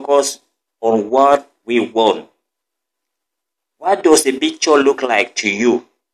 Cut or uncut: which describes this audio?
uncut